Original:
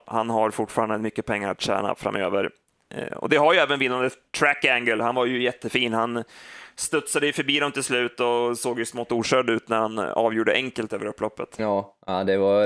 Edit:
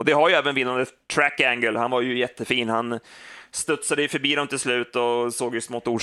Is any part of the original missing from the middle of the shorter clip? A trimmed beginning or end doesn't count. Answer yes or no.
no